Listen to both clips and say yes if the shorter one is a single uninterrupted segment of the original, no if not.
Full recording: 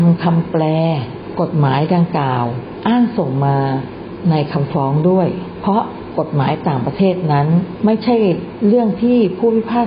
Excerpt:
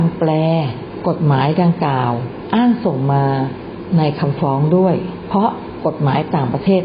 yes